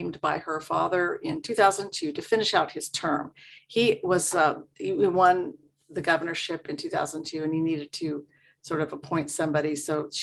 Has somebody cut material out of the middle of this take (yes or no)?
no